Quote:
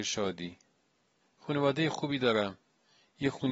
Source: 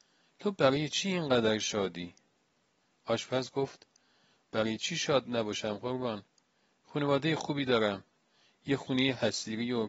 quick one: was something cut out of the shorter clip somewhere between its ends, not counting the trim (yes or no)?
yes